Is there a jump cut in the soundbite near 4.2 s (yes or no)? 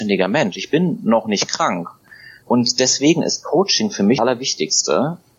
yes